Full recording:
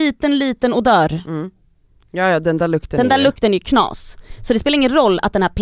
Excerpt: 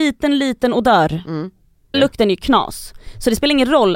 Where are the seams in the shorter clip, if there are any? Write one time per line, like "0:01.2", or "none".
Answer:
0:01.9